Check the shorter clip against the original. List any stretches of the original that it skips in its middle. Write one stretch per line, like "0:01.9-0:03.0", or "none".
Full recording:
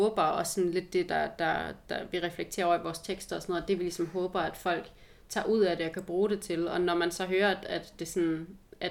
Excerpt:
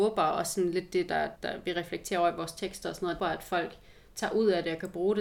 0:01.4-0:01.8
0:03.7-0:04.3